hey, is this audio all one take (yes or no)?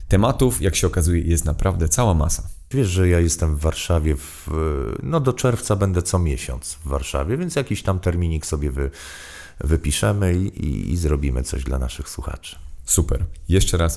no